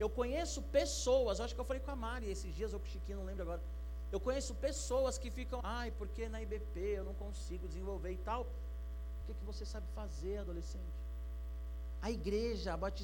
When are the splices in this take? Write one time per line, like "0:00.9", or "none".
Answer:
0:05.6
0:09.2